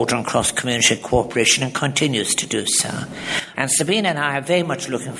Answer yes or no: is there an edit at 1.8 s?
no